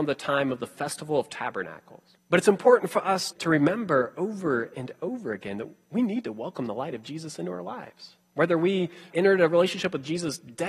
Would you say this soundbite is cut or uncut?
cut